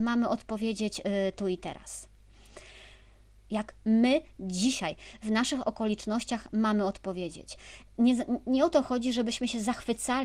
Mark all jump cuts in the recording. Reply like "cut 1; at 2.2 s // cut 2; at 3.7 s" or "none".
cut 1; at 3.5 s